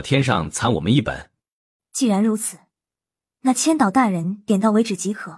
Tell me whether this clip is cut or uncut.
uncut